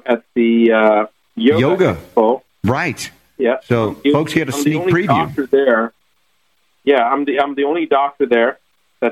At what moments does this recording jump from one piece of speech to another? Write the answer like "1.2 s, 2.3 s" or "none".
none